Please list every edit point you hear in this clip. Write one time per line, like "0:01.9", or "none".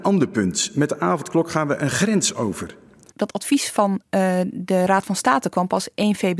0:03.1